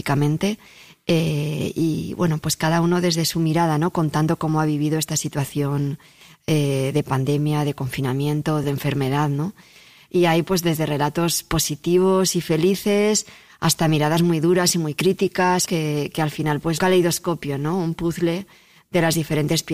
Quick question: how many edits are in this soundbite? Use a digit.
3